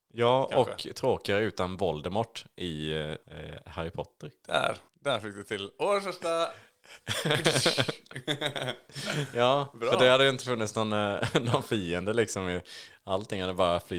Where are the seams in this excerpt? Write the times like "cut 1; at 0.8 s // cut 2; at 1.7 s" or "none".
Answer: cut 1; at 4.9 s